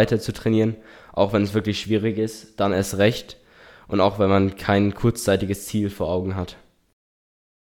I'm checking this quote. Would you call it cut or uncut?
uncut